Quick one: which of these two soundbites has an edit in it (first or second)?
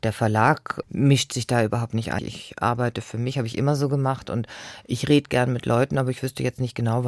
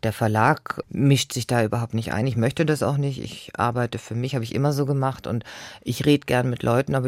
first